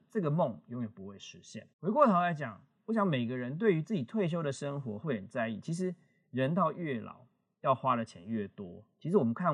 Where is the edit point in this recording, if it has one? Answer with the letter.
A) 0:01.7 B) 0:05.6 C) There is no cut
A